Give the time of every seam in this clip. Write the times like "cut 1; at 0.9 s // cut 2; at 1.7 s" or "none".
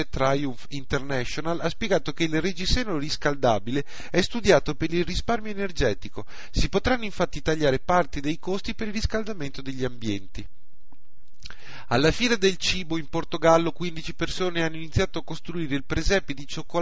none